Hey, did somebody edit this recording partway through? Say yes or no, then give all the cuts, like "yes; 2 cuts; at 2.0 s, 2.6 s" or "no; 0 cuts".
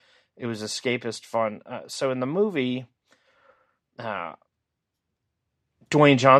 no; 0 cuts